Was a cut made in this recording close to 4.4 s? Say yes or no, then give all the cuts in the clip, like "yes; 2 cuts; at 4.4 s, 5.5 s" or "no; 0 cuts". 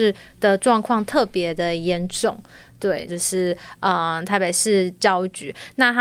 no; 1 cut; at 3.1 s